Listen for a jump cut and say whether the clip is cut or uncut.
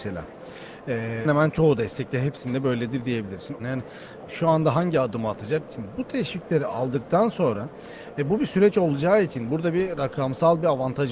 cut